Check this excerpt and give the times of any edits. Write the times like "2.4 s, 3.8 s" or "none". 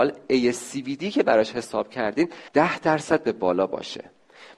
2.5 s